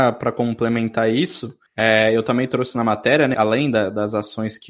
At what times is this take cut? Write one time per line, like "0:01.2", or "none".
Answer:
0:01.7
0:03.3